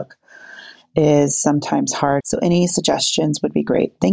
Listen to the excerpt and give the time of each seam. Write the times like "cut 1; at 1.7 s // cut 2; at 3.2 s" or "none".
cut 1; at 2.2 s